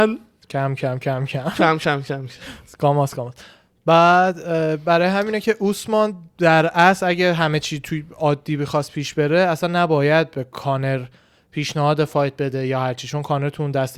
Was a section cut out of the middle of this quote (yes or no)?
no